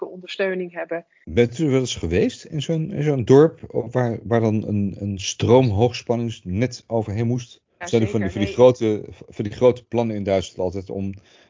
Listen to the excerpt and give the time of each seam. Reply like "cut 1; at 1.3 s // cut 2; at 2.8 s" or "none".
cut 1; at 1.2 s // cut 2; at 7.8 s